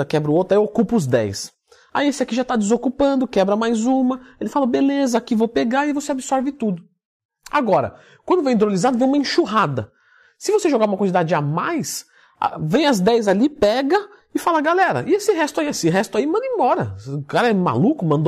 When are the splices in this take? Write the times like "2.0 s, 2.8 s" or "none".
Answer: none